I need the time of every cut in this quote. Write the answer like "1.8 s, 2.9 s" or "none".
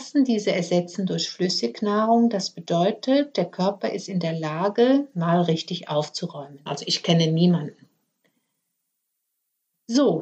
6.7 s